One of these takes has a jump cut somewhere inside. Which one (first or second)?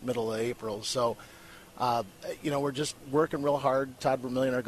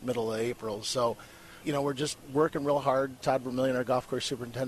second